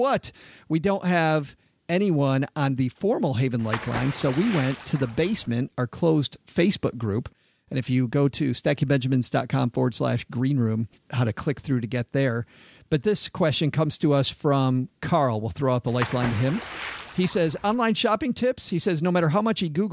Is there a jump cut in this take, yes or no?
yes